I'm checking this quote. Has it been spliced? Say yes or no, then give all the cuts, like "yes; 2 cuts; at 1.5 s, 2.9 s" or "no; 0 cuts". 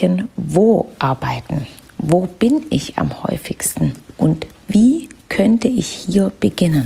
no; 0 cuts